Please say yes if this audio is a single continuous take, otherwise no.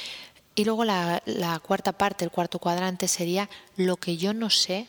yes